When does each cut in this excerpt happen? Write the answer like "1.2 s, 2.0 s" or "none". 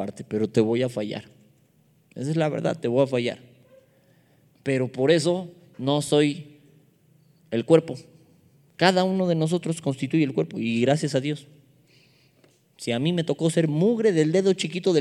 none